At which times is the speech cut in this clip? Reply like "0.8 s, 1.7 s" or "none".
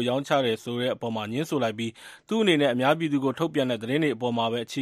none